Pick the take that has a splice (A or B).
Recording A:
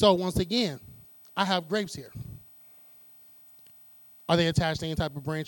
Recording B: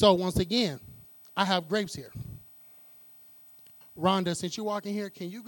B